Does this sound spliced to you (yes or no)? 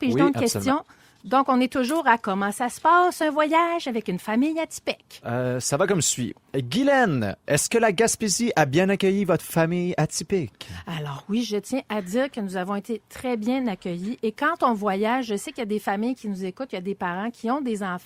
no